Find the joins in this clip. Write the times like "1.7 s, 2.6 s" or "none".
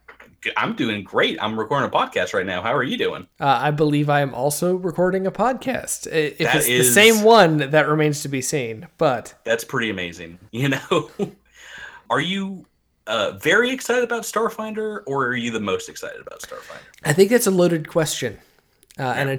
10.5 s